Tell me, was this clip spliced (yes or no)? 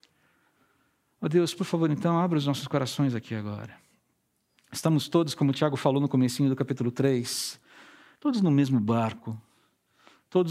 no